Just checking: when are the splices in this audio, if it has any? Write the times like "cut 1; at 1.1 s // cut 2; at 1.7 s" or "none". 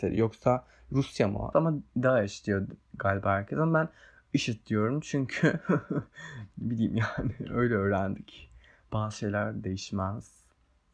cut 1; at 1.5 s